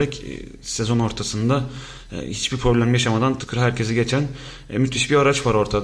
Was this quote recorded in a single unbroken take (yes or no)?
no